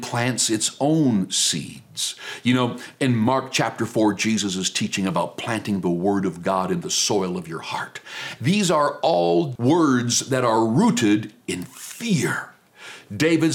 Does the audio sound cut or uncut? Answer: cut